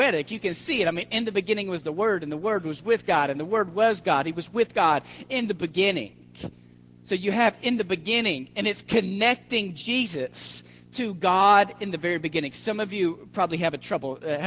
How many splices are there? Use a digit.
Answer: 0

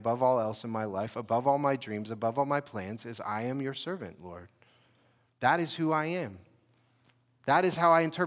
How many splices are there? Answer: 0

